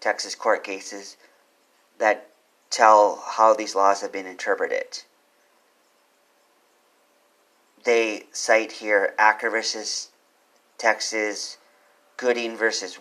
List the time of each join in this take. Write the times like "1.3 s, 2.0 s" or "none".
none